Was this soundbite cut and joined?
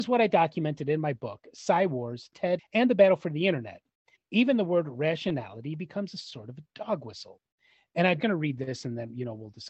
yes; 3 cuts; at 2.6 s, 4.2 s, 8.2 s

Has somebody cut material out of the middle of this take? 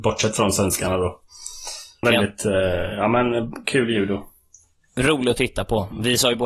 yes; 1 cut; at 2.0 s

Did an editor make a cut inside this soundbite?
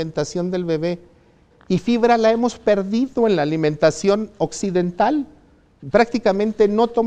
no; 0 cuts

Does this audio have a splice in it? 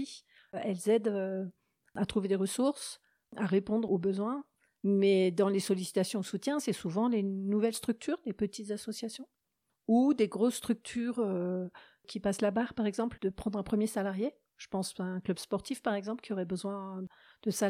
yes; 1 cut; at 13.2 s

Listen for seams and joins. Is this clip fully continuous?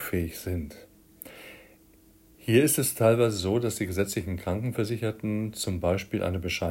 no; 1 cut; at 2.3 s

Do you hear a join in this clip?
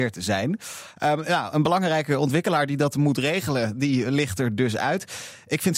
no; 0 cuts

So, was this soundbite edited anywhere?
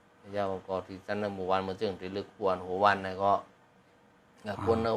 no; 0 cuts

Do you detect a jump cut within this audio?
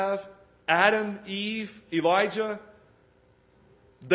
no; 0 cuts

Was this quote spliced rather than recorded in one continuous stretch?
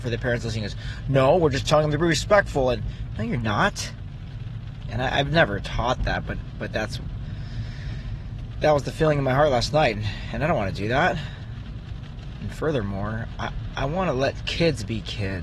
yes; 1 cut; at 4.8 s

